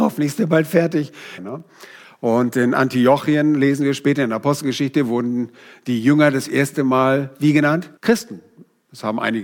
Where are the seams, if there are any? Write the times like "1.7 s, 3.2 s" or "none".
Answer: 1.4 s, 8.0 s